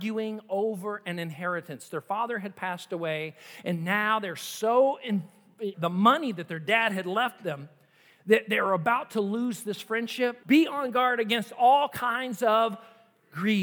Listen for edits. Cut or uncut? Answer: cut